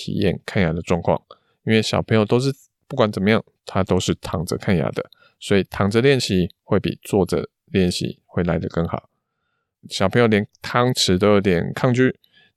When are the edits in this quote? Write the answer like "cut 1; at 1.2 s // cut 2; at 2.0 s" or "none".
cut 1; at 9.7 s